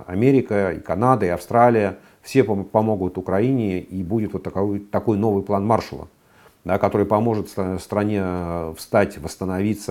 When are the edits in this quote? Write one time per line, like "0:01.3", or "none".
none